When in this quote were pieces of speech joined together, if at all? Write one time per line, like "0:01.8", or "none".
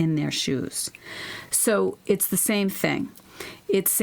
none

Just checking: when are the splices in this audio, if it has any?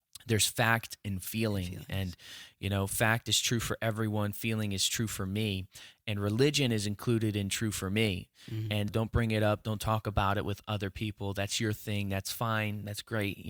0:08.9

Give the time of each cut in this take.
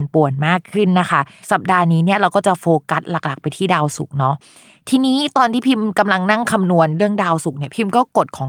none

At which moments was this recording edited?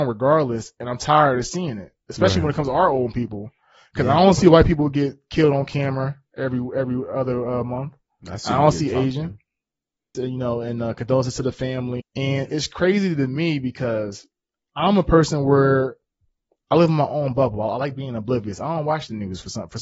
0:10.1
0:12.0

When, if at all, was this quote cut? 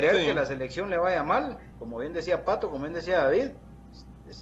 none

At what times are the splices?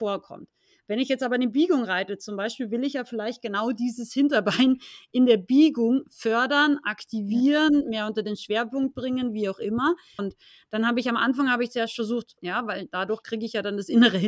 0:10.2
0:12.4

